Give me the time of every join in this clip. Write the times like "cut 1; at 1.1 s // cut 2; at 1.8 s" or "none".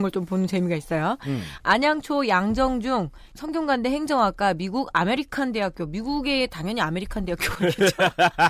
cut 1; at 3.3 s